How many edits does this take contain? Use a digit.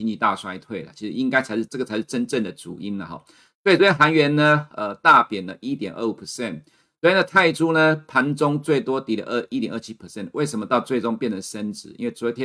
1